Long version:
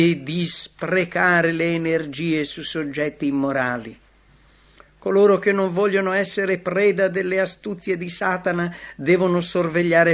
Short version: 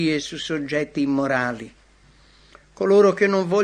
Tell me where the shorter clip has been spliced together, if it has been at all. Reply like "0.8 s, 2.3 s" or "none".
none